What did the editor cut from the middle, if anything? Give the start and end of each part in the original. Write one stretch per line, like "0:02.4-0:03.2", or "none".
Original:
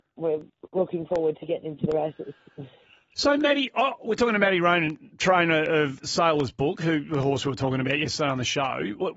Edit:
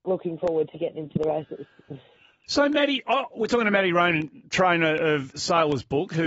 none

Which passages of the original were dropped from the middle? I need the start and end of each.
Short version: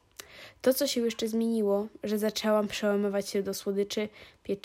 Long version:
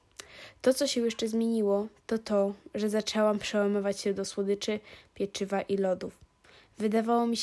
0:01.9-0:02.6

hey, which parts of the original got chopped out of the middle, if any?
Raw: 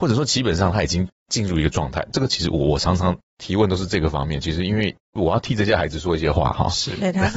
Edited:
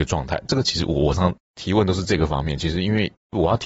0:02.8-0:03.0

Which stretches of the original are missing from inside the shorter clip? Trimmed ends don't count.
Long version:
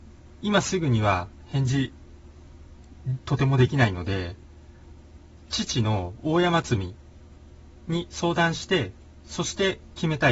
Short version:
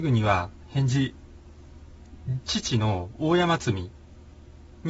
0:03.2-0:05.5

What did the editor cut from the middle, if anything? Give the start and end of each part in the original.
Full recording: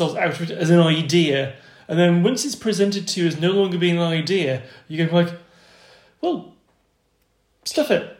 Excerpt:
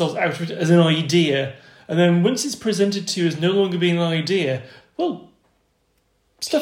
0:04.8-0:06.0

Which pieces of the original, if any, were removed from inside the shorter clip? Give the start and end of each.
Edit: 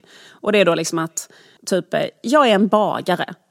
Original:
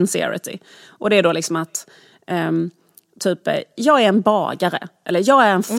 0:02.1-0:03.1

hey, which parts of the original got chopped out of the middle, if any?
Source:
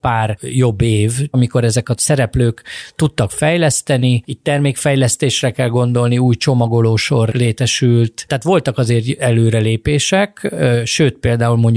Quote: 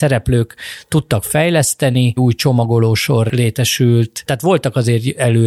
0:04.2-0:06.2

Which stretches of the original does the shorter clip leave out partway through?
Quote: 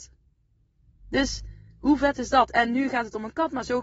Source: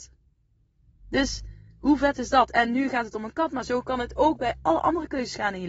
none

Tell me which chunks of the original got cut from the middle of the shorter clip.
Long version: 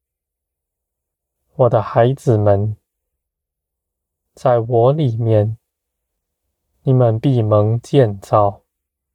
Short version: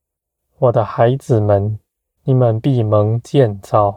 0:03.1-0:06.8

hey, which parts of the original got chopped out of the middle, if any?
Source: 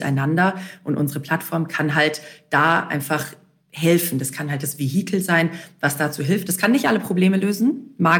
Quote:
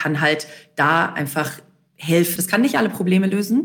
0:04.1-0:06.5

